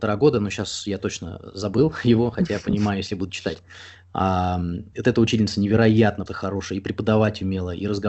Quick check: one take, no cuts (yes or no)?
no